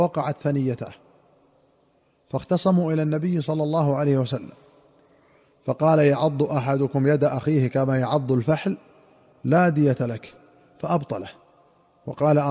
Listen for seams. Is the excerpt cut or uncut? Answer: uncut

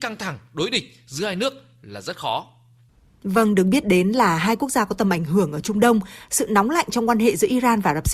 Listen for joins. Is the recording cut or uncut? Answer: uncut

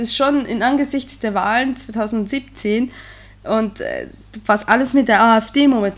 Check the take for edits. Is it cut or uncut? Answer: uncut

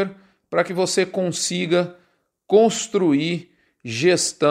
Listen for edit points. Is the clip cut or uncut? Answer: uncut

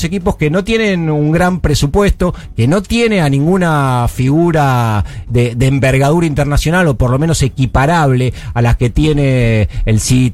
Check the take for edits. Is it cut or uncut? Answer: uncut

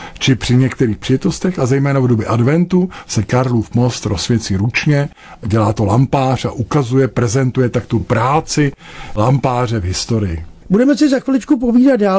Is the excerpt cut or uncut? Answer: uncut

